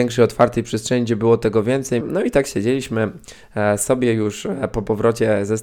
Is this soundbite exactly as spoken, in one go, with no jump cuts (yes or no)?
no